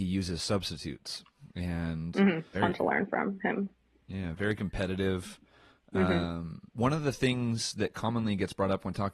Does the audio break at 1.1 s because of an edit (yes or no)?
no